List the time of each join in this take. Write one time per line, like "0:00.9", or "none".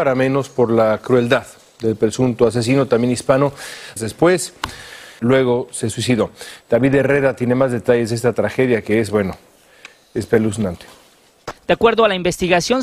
0:04.0
0:05.2